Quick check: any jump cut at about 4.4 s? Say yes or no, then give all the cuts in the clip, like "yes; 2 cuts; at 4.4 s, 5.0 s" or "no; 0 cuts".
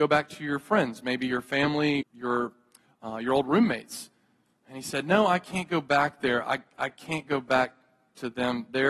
no; 1 cut; at 2.0 s